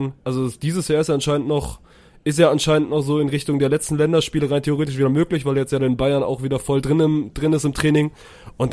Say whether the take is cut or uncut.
uncut